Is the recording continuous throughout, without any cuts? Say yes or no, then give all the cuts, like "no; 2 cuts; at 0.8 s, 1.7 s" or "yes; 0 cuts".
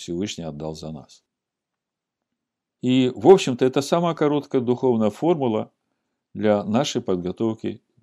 yes; 0 cuts